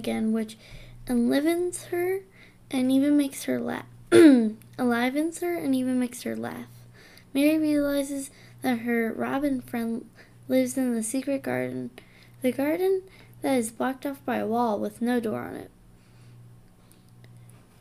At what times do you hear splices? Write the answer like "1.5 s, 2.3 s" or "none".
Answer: none